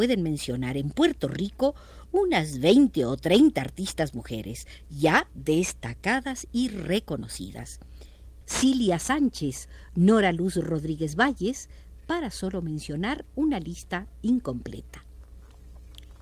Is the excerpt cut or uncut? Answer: cut